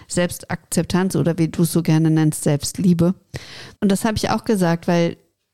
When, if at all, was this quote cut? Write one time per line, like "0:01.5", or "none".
0:03.8